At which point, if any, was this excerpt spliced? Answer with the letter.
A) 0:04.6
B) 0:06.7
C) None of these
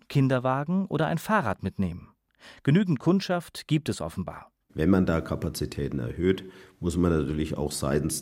A